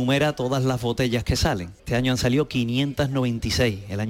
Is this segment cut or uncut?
cut